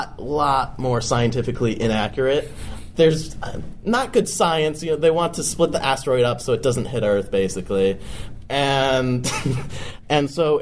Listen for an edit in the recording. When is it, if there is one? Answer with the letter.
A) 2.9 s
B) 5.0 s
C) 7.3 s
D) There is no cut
A